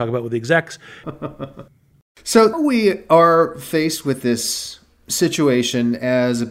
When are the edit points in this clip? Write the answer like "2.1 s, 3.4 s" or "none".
1.0 s, 2.5 s